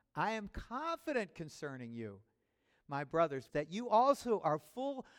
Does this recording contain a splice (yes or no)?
yes